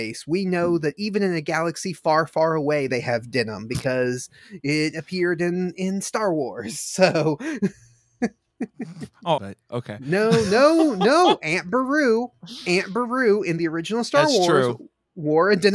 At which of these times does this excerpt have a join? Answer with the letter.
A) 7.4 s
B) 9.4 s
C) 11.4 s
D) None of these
B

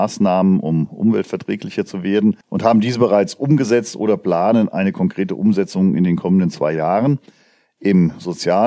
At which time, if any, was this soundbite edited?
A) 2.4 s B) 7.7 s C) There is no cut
A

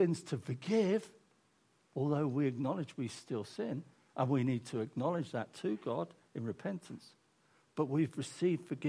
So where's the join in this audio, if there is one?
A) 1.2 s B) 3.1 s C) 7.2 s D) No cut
D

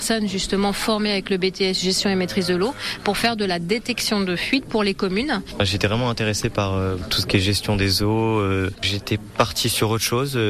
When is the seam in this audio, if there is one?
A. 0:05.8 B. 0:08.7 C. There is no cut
B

